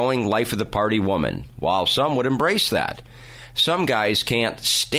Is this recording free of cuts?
yes; 0 cuts

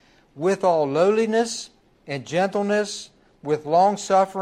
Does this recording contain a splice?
no; 0 cuts

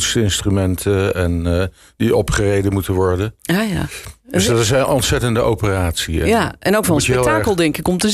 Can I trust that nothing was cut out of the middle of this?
yes; 0 cuts

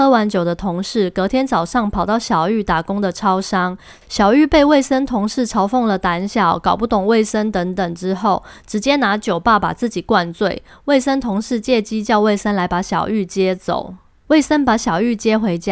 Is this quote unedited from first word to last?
no; 1 cut; at 4.0 s

